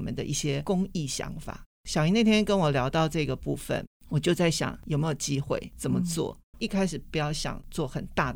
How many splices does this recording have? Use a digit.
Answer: 1